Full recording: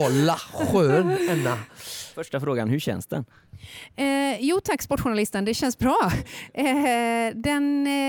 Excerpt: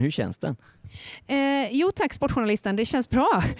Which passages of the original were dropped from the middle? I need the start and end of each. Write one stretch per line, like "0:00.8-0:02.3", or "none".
none